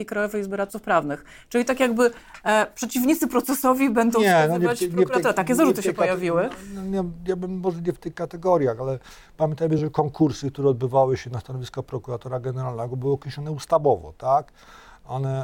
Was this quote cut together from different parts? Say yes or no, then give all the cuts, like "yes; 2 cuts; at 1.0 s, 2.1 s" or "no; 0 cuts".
no; 0 cuts